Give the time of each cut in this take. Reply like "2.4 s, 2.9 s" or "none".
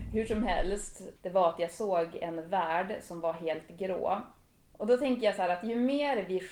1.2 s, 4.6 s

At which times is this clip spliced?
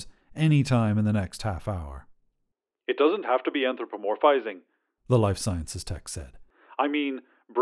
none

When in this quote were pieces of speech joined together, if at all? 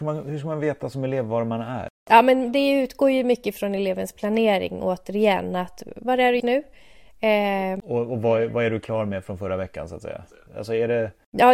6.4 s, 7.8 s, 10.5 s

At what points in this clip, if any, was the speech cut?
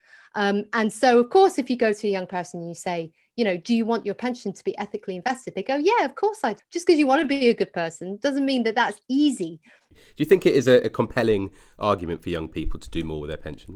6.6 s, 9.9 s

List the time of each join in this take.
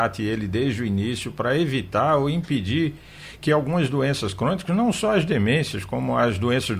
none

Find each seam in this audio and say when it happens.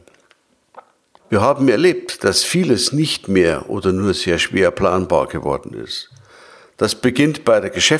1.2 s

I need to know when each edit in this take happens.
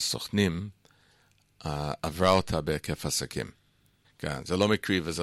4.0 s

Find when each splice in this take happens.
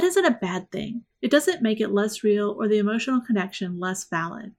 none

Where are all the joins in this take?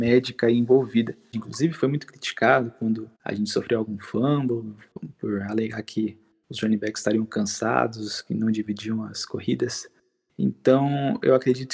1.3 s, 3.1 s

